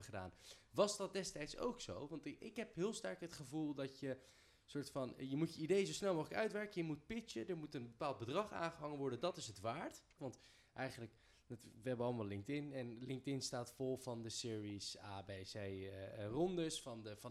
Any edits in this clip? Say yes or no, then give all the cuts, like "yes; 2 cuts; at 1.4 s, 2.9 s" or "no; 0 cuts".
yes; 1 cut; at 10.2 s